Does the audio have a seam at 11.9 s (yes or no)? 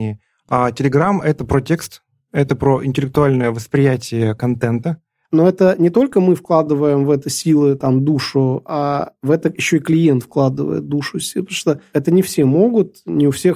yes